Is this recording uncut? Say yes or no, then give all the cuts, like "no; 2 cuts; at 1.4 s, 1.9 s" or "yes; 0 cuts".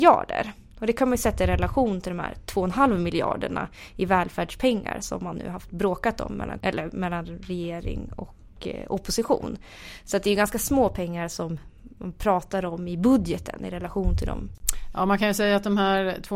no; 1 cut; at 6.6 s